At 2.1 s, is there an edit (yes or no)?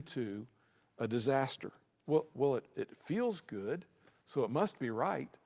yes